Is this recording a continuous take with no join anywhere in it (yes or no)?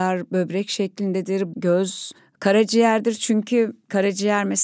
no